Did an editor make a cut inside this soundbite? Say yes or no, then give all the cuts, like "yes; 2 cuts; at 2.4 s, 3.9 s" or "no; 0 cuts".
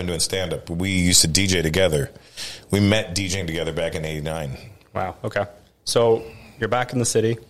no; 0 cuts